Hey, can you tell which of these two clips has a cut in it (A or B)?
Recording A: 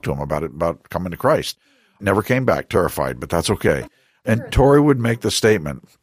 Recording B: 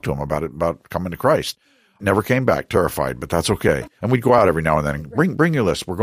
B